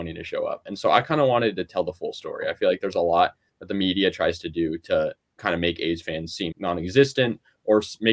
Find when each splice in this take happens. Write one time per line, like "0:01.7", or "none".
0:06.5